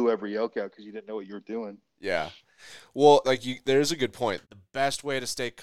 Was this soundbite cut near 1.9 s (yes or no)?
no